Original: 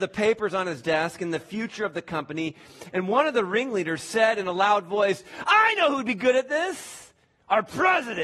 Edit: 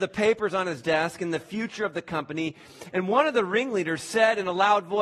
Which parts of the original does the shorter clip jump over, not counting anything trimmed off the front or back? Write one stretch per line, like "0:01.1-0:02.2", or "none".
none